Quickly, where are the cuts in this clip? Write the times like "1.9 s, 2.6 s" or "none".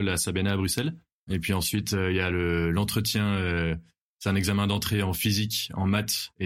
1.3 s